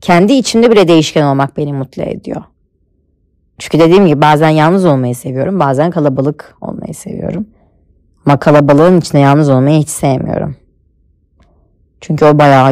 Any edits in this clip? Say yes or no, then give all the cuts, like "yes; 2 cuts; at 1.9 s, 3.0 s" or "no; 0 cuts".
no; 0 cuts